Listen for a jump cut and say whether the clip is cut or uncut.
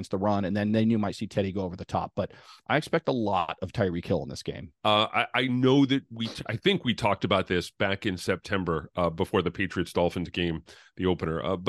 cut